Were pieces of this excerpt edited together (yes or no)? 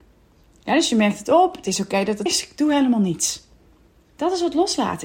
yes